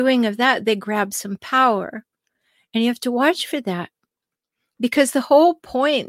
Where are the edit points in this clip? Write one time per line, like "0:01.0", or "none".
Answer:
none